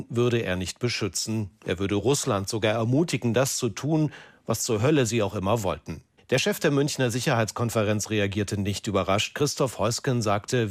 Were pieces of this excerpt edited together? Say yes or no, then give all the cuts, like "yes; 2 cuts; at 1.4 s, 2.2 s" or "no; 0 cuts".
no; 0 cuts